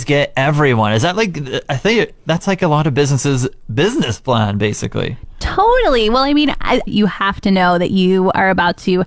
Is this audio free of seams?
no; 1 cut; at 6.9 s

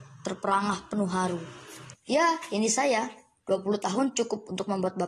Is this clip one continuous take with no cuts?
no; 1 cut; at 1.9 s

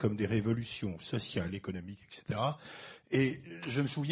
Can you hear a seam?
no; 0 cuts

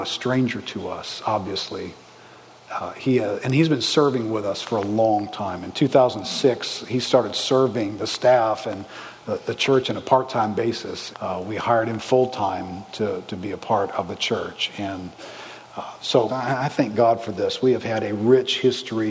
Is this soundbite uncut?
no; 2 cuts; at 11.1 s, 16.3 s

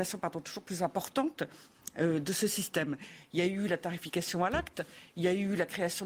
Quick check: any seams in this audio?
no; 0 cuts

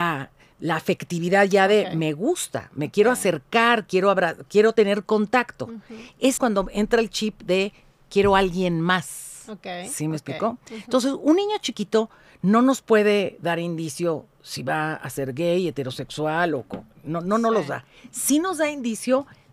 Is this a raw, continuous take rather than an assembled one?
no; 1 cut; at 6.4 s

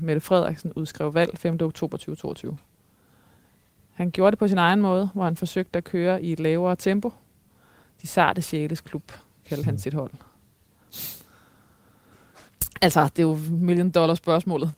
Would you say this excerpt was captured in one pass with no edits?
yes; 0 cuts

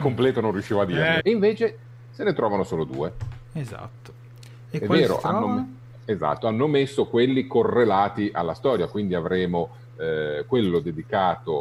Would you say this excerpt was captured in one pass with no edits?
no; 1 cut; at 1.2 s

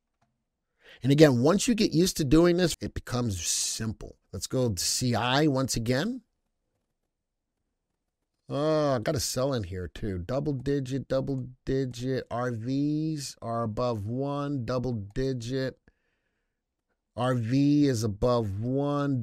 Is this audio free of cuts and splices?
no; 2 cuts; at 2.7 s, 4.2 s

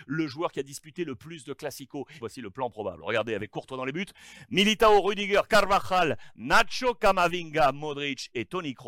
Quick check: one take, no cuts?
no; 1 cut; at 2.2 s

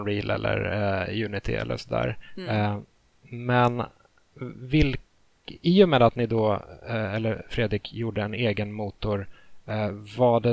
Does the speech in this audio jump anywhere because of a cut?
no; 0 cuts

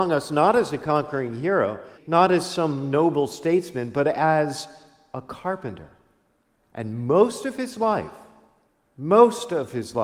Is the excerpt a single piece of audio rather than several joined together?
no; 1 cut; at 2.0 s

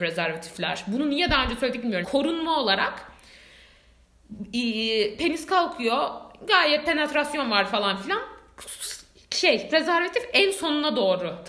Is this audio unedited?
no; 1 cut; at 2.0 s

